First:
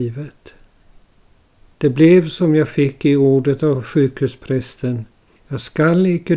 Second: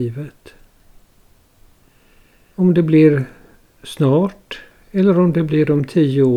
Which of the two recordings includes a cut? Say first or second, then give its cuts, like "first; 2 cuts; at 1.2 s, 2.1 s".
first; 2 cuts; at 1.7 s, 5.4 s